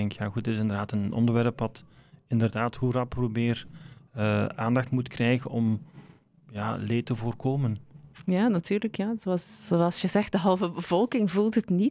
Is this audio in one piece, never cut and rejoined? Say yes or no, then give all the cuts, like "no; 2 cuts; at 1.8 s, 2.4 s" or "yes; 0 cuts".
yes; 0 cuts